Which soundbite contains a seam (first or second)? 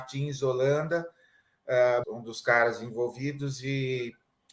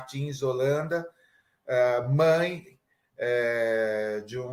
first